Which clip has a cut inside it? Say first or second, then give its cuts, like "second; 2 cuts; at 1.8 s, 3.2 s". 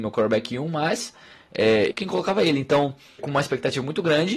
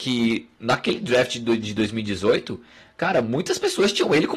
first; 2 cuts; at 1.9 s, 3.2 s